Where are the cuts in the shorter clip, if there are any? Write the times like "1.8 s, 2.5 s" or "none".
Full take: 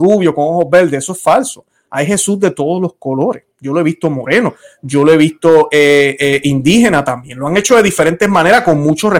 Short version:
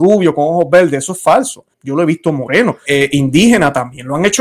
1.7 s, 2.9 s